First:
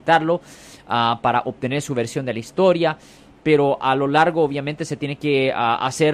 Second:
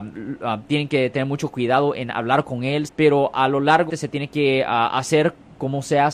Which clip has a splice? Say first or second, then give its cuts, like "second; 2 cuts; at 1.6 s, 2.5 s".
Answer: second; 2 cuts; at 2.9 s, 3.9 s